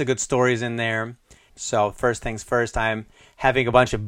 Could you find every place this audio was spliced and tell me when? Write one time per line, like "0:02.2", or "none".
0:01.5